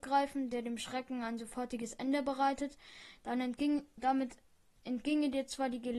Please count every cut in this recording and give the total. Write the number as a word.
one